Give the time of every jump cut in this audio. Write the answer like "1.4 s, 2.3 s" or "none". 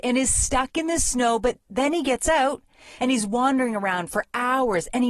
3.0 s